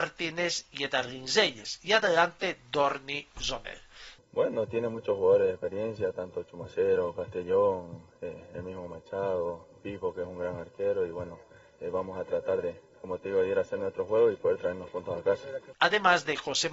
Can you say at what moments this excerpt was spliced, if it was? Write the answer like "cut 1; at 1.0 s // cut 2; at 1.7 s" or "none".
cut 1; at 4.2 s // cut 2; at 15.7 s